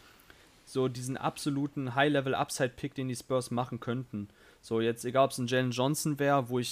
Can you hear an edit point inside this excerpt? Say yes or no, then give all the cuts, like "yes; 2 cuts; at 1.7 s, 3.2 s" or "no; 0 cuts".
no; 0 cuts